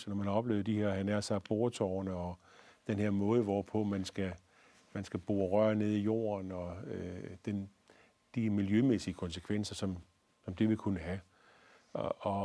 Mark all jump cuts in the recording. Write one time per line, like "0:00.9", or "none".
none